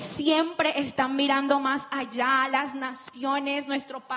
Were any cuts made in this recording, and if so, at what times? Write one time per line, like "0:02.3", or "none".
none